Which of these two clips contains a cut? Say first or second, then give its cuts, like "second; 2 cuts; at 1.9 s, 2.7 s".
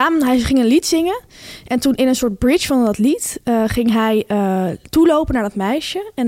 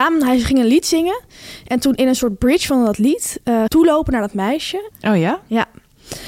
second; 2 cuts; at 3.7 s, 4.9 s